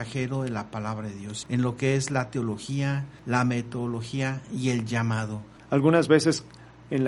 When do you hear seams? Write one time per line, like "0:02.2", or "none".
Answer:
0:01.4
0:05.6